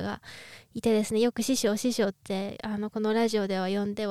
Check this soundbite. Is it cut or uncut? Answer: uncut